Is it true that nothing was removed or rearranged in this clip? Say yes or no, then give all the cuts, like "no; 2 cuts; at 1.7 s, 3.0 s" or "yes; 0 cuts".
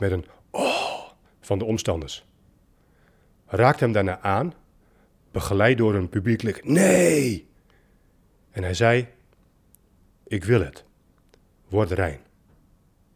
yes; 0 cuts